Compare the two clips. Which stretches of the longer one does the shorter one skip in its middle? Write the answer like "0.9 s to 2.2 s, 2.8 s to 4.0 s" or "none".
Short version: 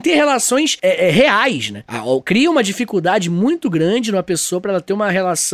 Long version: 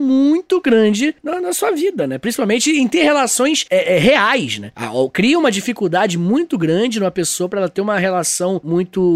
none